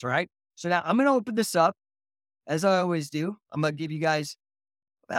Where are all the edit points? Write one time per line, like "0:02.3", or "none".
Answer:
none

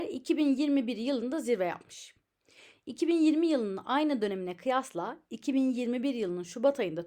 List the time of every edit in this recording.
none

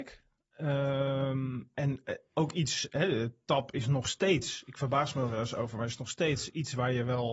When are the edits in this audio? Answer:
none

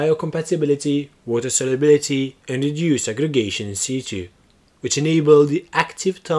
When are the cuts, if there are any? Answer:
0:04.7

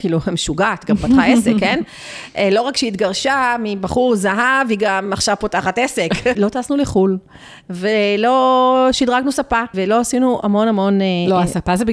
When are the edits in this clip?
0:06.3
0:09.7

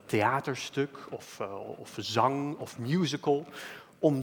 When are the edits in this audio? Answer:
none

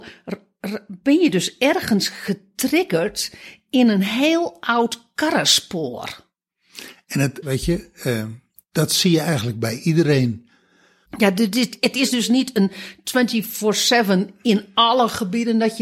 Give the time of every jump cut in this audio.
0:07.4
0:11.1

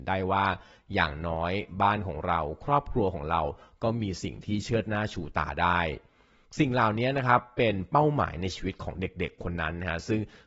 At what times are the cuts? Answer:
none

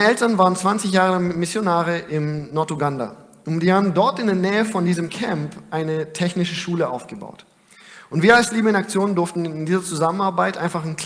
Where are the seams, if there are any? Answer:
none

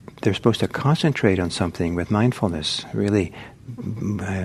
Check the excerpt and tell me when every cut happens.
none

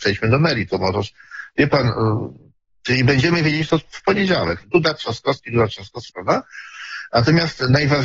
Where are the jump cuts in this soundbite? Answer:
0:04.6
0:06.1

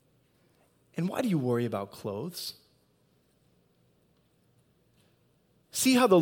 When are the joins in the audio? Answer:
none

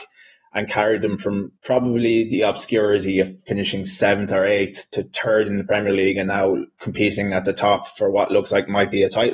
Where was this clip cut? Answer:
0:01.6
0:06.7

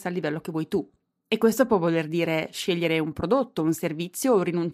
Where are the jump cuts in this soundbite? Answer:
none

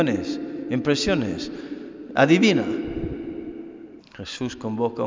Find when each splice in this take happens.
0:02.1
0:04.0

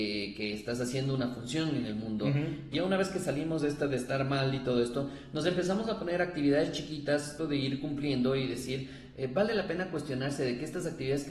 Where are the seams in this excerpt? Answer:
0:02.7
0:07.4

